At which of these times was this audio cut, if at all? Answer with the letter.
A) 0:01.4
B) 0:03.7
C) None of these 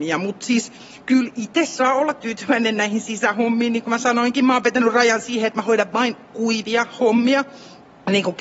C